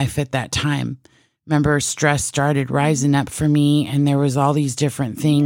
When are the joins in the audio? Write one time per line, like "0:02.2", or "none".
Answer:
none